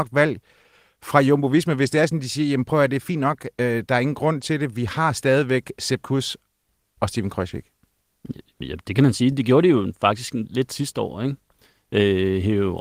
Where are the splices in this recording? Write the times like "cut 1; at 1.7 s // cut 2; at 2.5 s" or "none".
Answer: none